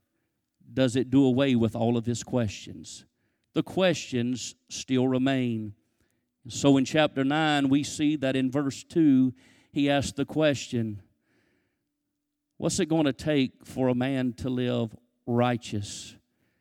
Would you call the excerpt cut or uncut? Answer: uncut